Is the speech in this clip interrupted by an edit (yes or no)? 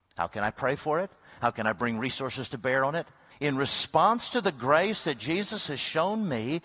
yes